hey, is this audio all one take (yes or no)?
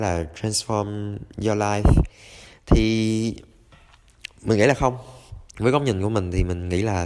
no